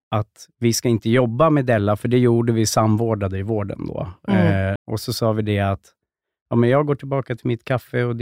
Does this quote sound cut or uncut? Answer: cut